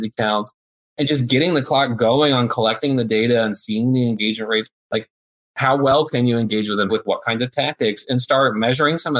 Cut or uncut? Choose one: cut